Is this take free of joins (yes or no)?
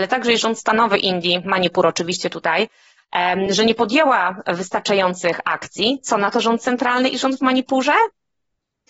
yes